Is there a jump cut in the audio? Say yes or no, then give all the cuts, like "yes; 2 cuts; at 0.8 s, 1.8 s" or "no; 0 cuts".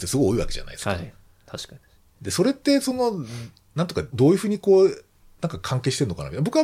yes; 1 cut; at 4.1 s